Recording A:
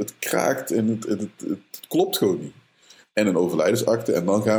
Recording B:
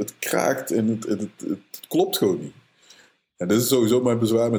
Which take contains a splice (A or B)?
A